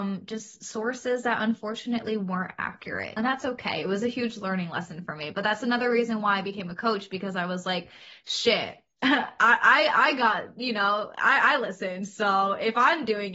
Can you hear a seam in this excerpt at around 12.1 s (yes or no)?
no